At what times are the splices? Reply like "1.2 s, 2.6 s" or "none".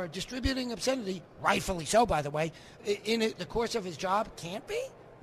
2.8 s